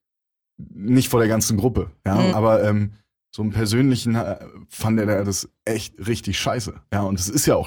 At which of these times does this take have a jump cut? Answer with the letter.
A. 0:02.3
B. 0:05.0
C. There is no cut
A